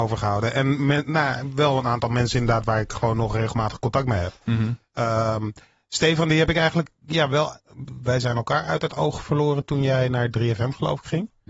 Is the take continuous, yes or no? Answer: yes